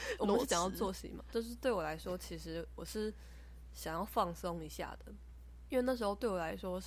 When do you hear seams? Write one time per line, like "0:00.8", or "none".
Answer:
0:01.3
0:05.7